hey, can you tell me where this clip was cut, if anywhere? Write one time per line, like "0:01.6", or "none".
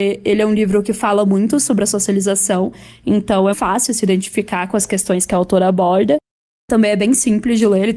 0:03.5